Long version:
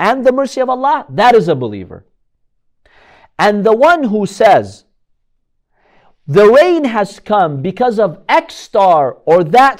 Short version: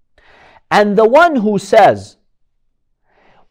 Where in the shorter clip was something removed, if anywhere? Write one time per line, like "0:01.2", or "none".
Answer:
none